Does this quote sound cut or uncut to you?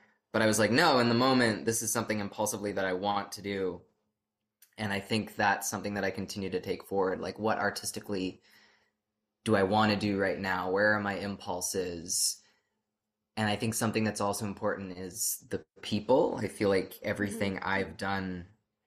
uncut